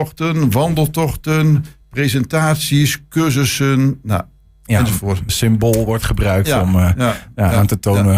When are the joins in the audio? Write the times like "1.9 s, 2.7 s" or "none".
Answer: 5.3 s